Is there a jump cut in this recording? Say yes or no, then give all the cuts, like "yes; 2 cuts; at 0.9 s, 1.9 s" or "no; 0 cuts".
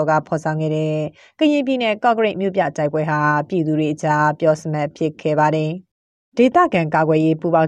no; 0 cuts